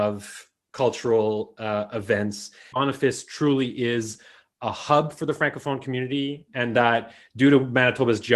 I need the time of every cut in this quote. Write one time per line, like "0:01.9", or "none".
0:02.7